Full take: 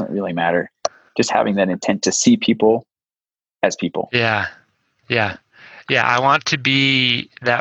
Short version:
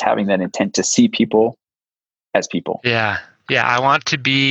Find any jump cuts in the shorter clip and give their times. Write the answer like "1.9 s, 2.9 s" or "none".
3.4 s